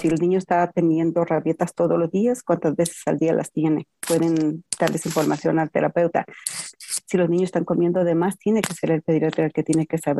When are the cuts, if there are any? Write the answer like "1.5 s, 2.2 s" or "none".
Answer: 4.0 s, 6.7 s